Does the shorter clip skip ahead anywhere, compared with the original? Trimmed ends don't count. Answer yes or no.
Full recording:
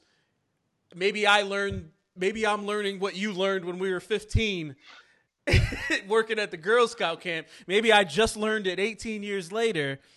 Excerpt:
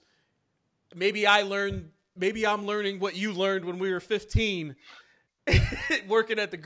no